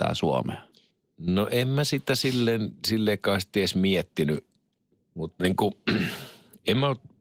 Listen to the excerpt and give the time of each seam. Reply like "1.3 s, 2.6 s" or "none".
4.9 s